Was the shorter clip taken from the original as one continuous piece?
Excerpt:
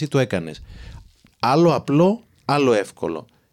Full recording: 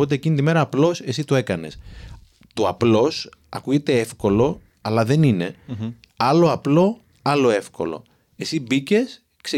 no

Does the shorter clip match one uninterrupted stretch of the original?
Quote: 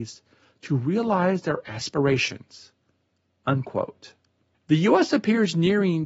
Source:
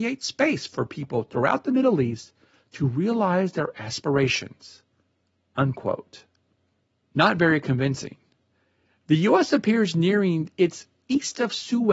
no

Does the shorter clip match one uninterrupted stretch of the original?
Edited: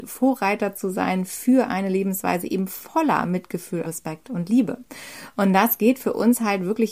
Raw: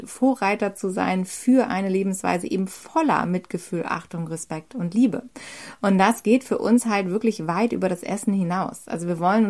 no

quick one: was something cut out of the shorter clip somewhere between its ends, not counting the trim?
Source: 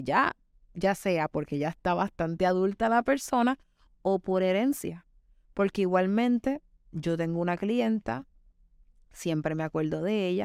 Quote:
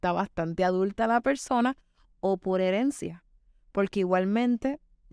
no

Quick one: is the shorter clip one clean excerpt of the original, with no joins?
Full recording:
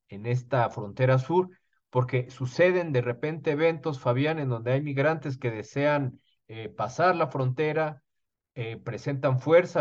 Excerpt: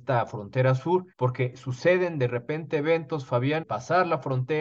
no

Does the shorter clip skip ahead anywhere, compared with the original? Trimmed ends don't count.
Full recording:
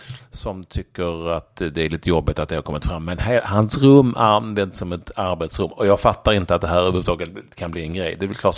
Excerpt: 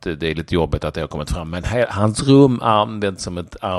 no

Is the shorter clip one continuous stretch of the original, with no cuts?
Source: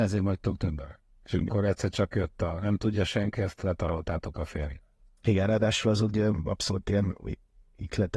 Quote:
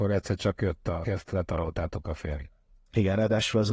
no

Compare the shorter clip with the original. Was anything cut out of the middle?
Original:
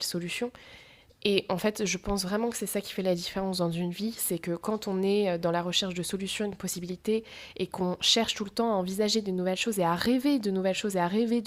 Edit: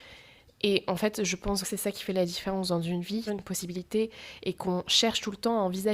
yes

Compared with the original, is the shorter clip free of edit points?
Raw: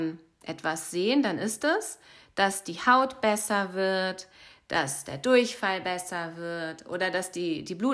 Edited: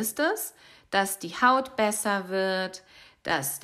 yes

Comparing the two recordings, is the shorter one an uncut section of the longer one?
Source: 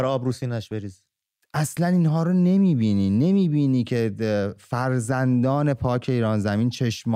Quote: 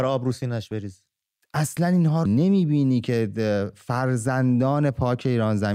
no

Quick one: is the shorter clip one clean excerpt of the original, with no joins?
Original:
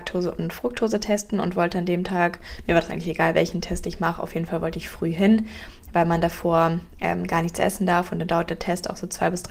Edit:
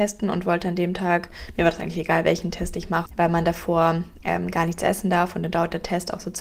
no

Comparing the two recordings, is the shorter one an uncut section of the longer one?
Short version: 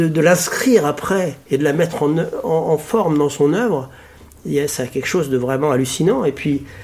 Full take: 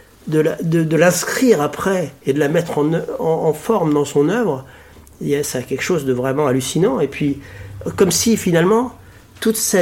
yes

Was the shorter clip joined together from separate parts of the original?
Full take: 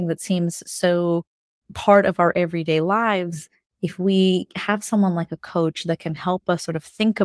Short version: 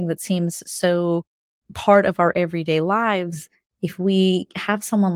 no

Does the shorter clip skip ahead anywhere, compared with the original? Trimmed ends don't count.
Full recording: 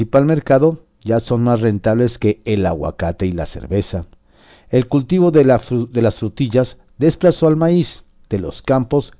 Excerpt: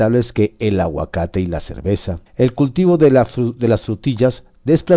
yes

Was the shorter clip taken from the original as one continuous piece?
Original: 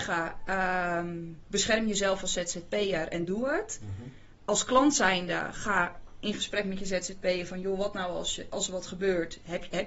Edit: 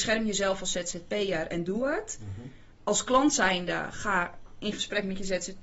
yes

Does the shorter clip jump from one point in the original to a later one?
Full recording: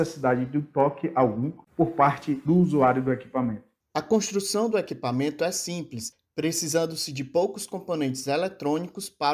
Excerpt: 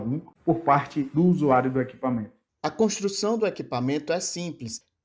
no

